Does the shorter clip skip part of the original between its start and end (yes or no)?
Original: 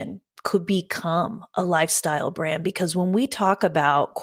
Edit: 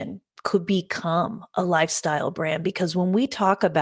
no